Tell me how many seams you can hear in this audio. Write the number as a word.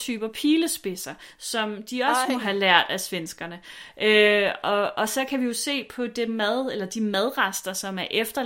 zero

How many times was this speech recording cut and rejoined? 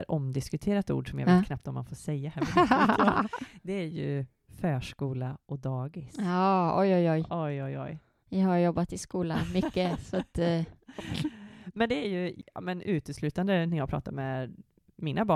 one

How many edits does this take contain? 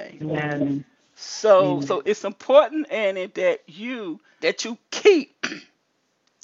two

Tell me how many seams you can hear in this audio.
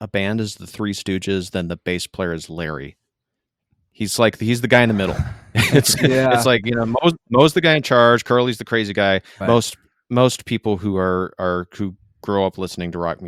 one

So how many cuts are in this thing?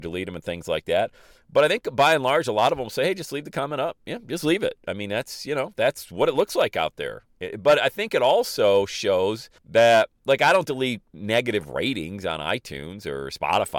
one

